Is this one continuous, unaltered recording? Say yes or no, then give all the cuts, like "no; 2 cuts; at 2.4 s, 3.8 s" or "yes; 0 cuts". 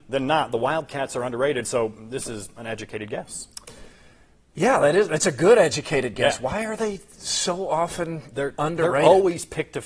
yes; 0 cuts